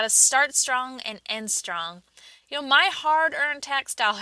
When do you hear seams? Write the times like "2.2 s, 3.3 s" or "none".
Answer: 2.4 s